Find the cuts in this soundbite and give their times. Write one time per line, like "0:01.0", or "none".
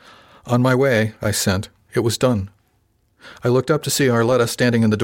0:01.9